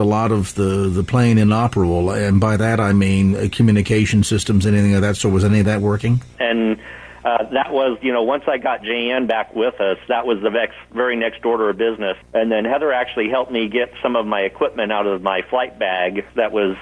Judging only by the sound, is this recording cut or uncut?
cut